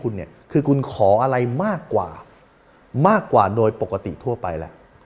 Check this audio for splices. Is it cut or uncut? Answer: uncut